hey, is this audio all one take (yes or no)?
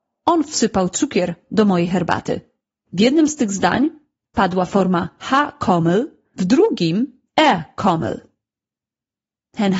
no